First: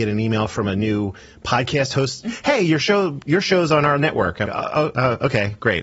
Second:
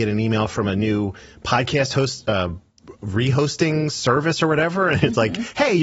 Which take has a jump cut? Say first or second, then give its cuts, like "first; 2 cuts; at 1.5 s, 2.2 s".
first; 2 cuts; at 2.2 s, 4.5 s